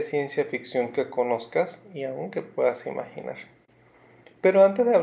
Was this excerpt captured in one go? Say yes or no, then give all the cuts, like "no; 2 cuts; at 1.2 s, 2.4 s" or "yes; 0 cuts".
yes; 0 cuts